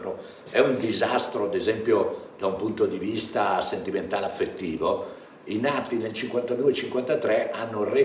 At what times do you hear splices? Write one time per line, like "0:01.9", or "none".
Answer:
none

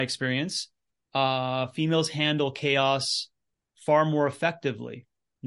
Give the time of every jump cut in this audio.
none

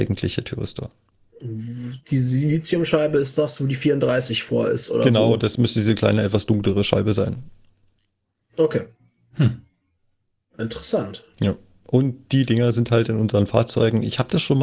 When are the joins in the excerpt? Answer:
none

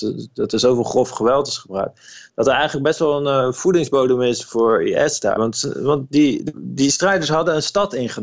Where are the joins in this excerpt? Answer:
0:05.4
0:06.5

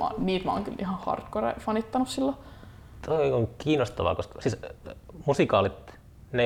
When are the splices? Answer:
none

